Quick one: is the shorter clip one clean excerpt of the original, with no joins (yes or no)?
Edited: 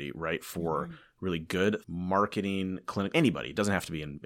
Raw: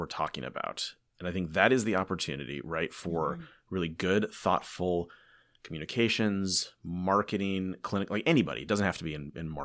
no